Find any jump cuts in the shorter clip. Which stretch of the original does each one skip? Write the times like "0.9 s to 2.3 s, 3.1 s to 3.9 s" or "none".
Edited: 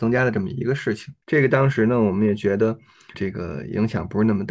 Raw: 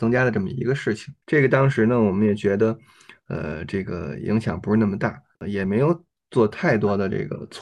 3.1 s to 3.7 s